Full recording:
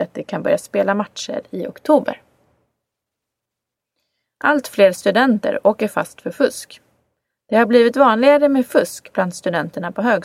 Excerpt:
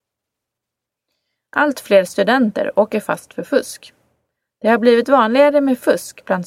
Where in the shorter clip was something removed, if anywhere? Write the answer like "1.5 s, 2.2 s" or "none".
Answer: none